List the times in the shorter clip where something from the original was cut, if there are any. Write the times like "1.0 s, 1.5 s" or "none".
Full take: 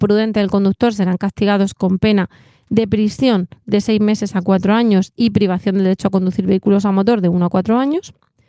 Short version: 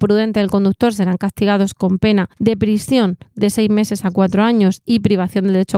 2.3 s